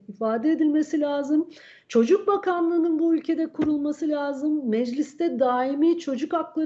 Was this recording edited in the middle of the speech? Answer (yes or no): no